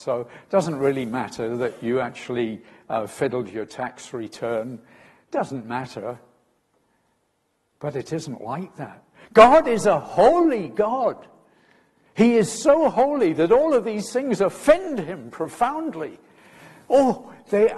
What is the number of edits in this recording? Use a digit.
0